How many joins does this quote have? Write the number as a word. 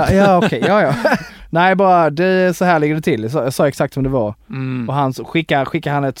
one